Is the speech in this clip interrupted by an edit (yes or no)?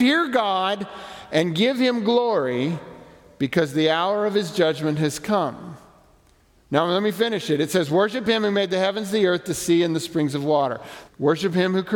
yes